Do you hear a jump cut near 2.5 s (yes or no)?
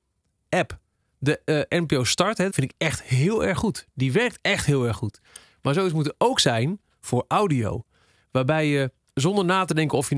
yes